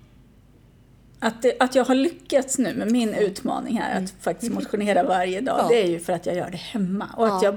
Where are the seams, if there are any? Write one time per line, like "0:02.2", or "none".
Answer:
none